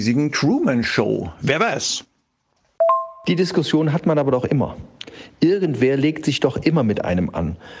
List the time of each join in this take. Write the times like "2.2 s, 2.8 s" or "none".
none